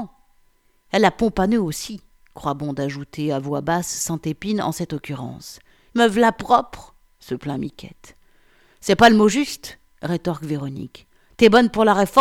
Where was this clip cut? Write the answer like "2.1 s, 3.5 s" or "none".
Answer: 5.9 s